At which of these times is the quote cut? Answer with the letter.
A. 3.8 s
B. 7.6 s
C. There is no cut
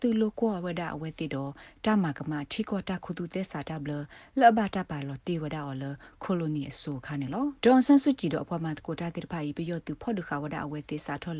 B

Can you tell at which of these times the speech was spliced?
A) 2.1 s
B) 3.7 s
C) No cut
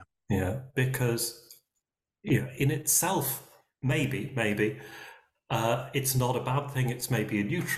C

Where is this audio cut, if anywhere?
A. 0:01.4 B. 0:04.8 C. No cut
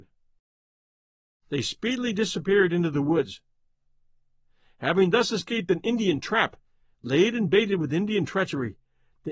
A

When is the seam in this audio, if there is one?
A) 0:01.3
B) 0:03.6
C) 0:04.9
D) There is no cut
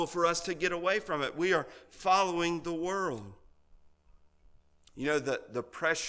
C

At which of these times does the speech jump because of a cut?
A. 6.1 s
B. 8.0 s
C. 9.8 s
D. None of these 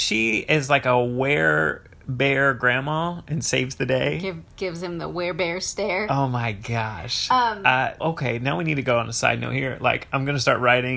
B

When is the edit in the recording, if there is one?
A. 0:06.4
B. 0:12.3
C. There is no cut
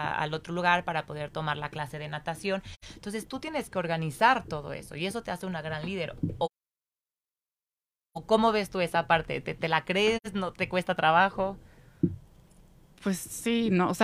C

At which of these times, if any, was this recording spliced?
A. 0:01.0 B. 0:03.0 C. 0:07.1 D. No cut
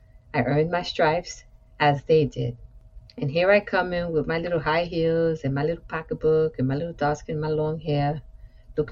B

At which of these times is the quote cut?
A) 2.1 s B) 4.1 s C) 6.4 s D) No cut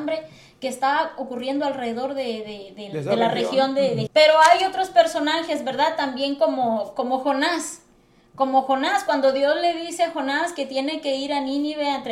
B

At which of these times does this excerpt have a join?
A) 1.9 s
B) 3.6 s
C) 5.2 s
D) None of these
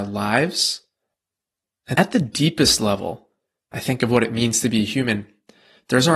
A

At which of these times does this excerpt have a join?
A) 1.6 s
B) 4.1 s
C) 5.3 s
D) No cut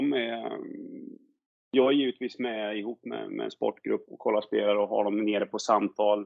B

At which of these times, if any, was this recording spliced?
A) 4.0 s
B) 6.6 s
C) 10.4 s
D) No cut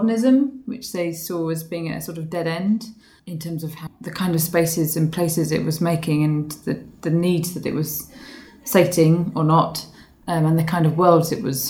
D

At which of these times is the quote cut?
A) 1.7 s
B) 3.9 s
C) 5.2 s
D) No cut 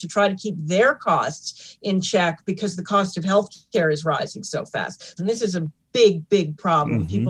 C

